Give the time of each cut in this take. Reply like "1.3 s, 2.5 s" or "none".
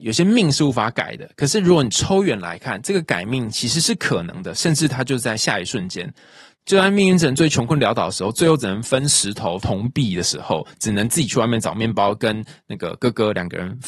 9.6 s